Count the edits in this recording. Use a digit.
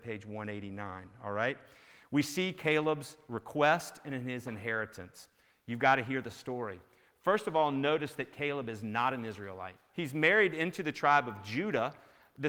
1